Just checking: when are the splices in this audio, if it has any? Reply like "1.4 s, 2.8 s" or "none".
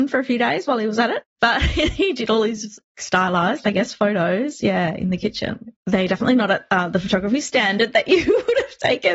5.8 s